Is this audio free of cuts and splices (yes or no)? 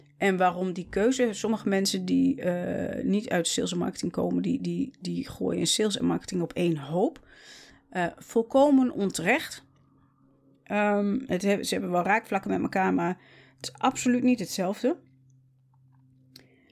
yes